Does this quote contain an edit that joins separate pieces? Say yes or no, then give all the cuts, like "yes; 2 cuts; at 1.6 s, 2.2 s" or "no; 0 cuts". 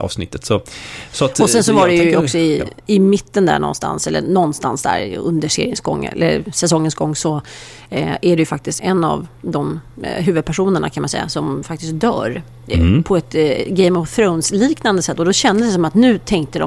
yes; 1 cut; at 8.8 s